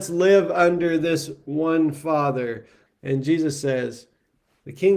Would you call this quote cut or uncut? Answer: cut